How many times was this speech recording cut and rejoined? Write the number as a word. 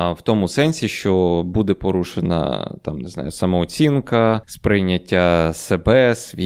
zero